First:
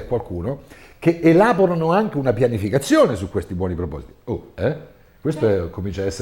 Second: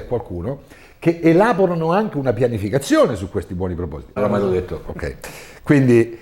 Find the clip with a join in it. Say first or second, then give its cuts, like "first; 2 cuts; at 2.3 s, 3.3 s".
second; 1 cut; at 4.2 s